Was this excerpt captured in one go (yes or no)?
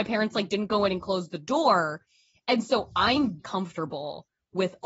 no